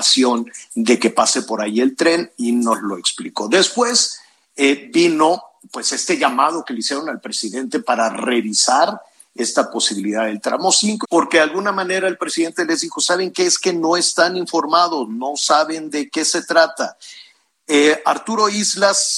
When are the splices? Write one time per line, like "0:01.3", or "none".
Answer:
0:11.0